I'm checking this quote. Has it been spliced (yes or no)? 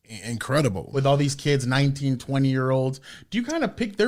yes